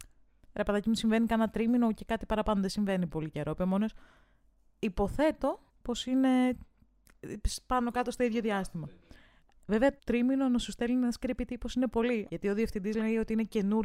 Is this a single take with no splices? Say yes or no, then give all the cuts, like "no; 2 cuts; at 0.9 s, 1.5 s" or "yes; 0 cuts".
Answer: no; 3 cuts; at 5.7 s, 10.0 s, 12.3 s